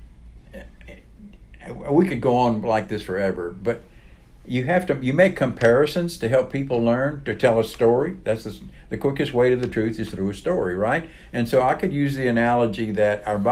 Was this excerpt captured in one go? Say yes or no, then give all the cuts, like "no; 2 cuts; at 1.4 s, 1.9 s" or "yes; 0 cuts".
yes; 0 cuts